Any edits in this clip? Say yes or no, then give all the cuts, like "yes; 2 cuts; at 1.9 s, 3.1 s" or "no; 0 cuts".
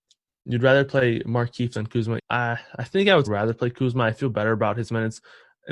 yes; 2 cuts; at 2.2 s, 3.3 s